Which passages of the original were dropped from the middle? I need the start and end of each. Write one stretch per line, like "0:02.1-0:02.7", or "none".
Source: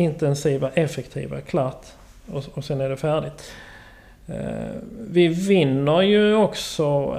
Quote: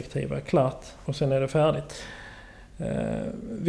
0:02.1-0:02.5